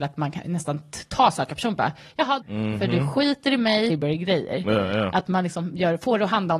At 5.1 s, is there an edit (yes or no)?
no